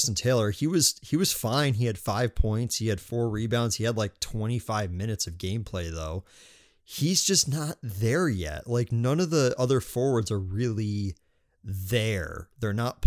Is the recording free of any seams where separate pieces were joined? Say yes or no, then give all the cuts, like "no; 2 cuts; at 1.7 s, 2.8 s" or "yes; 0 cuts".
yes; 0 cuts